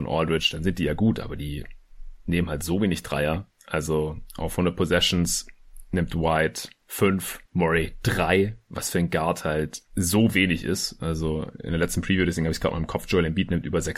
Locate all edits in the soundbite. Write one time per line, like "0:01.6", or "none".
none